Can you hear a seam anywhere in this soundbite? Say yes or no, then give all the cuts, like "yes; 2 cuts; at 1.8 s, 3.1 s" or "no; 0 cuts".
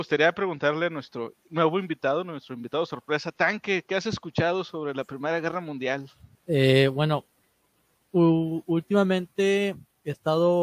yes; 1 cut; at 6.3 s